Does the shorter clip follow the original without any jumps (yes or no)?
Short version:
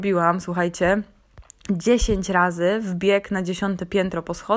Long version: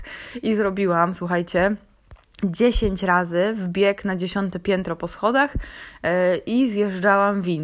yes